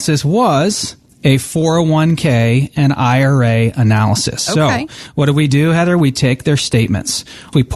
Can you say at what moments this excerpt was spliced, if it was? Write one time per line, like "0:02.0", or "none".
none